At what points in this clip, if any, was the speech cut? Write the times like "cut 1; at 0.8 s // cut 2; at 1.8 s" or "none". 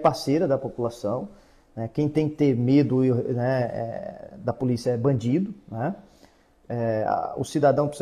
none